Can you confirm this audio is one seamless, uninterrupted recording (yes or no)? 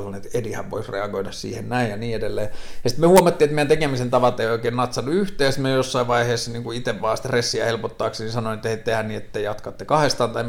yes